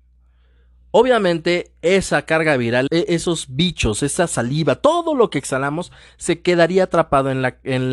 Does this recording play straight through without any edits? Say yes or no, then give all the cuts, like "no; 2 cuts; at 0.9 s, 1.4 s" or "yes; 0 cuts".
no; 1 cut; at 2.9 s